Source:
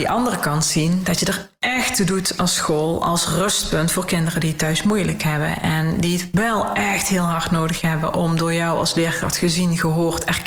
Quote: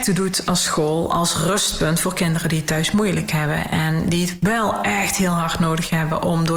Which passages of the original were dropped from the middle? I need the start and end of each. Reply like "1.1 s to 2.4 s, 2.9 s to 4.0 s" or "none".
none